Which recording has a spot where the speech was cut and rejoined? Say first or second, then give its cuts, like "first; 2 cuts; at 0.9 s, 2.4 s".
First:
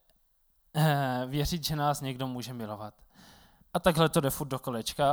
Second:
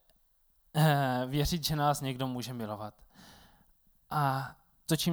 first; 1 cut; at 3.6 s